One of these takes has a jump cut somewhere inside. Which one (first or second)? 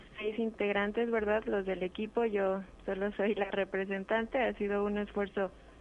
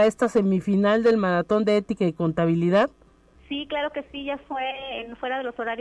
second